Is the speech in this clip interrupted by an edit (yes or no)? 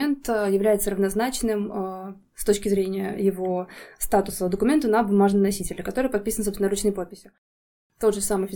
no